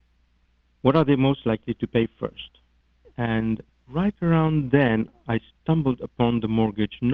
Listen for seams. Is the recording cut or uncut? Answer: cut